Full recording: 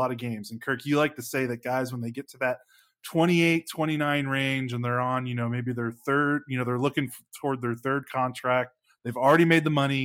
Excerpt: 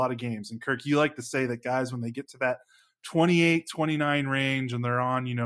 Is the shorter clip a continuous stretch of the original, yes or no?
yes